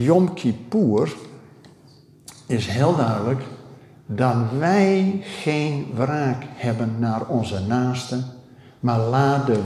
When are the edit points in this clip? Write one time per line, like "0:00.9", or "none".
none